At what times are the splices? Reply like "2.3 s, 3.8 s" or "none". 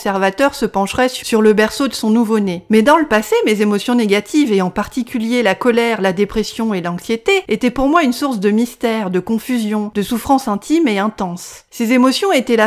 none